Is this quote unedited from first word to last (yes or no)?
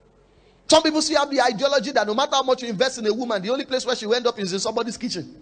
yes